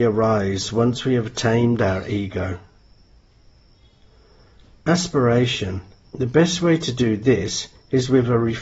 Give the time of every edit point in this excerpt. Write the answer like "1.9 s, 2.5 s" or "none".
6.1 s